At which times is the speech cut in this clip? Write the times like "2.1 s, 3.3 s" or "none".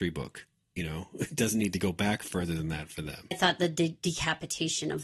1.3 s, 3.3 s